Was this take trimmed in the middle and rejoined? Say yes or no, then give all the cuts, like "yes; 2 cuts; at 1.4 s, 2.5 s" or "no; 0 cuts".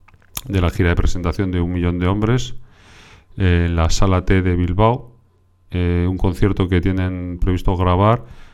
no; 0 cuts